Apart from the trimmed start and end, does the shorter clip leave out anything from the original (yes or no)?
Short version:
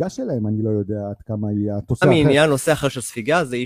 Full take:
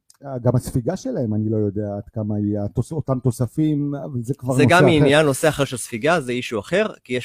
yes